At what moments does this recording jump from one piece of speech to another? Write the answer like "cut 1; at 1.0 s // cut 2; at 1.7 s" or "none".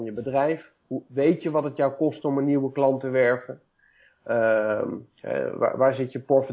none